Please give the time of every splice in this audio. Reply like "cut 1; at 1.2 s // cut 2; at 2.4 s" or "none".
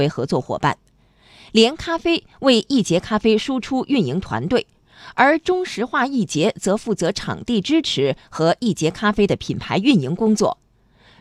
none

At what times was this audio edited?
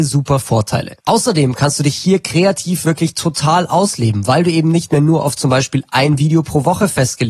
cut 1; at 1.0 s

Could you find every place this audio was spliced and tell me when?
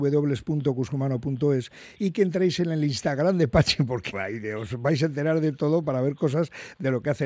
cut 1; at 4.1 s

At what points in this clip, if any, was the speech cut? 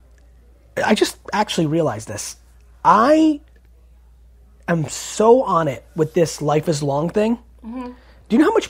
none

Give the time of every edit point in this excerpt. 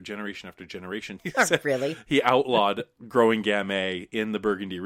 cut 1; at 1.2 s

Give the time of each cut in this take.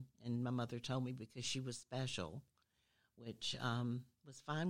none

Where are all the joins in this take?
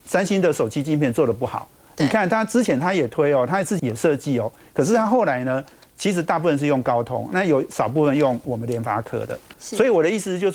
cut 1; at 3.8 s // cut 2; at 9.5 s

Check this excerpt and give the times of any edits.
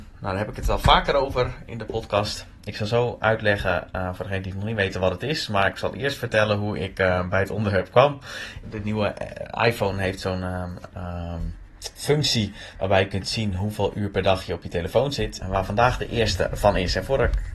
cut 1; at 8.6 s // cut 2; at 15.4 s

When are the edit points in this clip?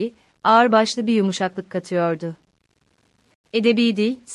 cut 1; at 3.4 s

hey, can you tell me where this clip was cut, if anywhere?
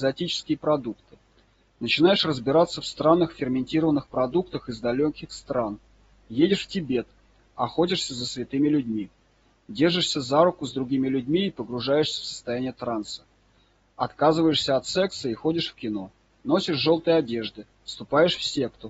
none

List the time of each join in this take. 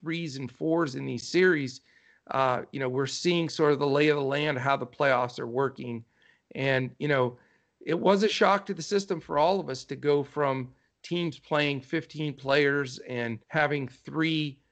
cut 1; at 13.4 s

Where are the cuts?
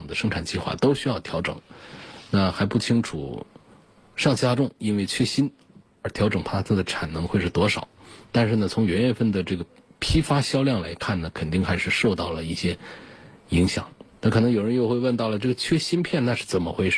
none

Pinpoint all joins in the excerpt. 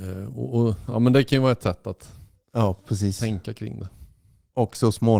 none

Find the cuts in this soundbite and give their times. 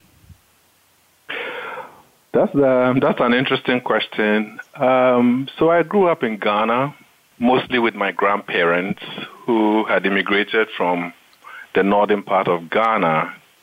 cut 1; at 7.3 s

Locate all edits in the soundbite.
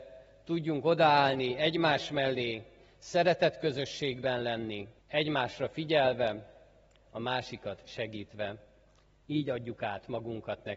cut 1; at 5.0 s // cut 2; at 9.2 s

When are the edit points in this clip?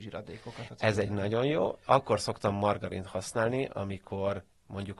none

